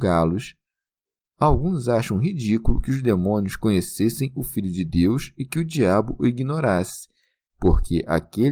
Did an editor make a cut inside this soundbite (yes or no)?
no